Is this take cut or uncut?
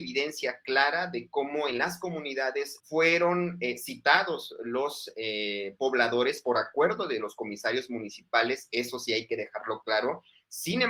cut